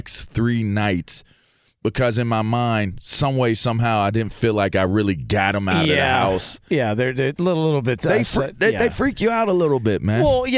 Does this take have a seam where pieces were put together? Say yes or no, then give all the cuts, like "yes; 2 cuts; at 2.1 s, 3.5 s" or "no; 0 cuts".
no; 0 cuts